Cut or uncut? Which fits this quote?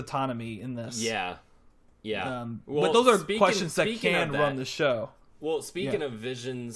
uncut